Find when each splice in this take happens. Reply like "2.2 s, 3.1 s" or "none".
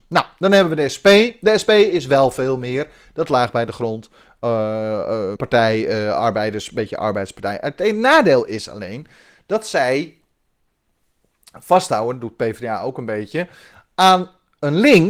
5.4 s